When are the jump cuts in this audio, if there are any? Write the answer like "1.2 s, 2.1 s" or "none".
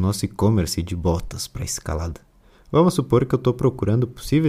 none